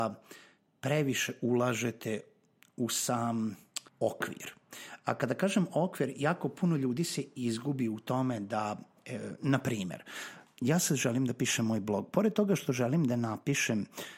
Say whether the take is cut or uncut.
cut